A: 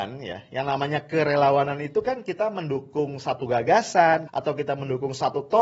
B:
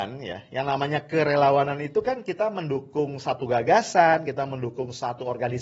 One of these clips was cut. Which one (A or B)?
A